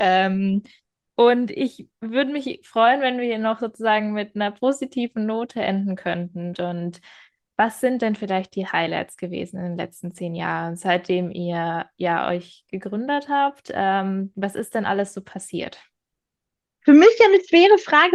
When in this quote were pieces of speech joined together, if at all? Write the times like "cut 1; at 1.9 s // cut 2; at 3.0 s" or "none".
cut 1; at 6.5 s

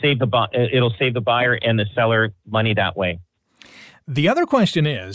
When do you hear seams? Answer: none

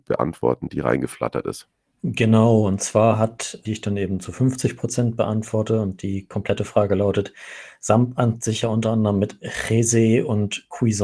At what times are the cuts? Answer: cut 1; at 3.7 s

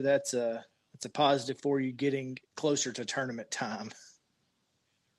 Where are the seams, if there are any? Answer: cut 1; at 2.4 s

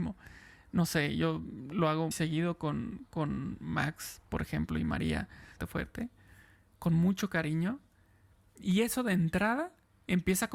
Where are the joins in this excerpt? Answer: cut 1; at 2.1 s // cut 2; at 5.6 s

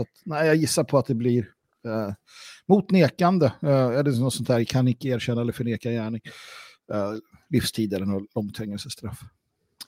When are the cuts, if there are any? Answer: none

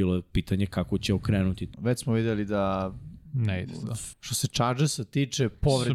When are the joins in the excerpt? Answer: cut 1; at 1.7 s // cut 2; at 4.1 s

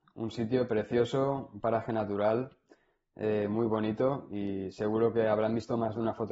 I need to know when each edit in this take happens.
none

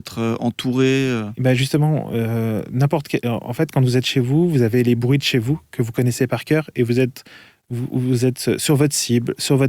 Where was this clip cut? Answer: none

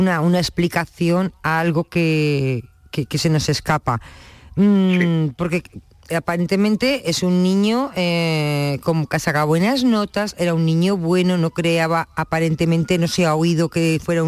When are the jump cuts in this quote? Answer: none

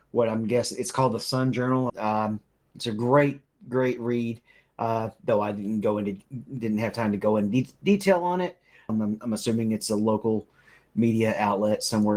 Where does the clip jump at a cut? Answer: cut 1; at 1.9 s // cut 2; at 8.9 s

